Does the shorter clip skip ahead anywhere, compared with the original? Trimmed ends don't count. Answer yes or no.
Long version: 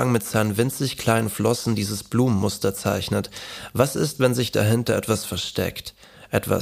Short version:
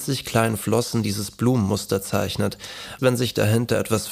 yes